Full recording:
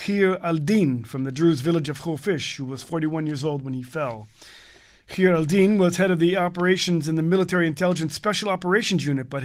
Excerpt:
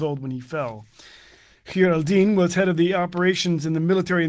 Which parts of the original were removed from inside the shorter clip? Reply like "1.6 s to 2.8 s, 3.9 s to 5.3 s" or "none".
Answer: none